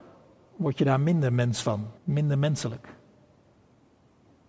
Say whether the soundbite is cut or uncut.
cut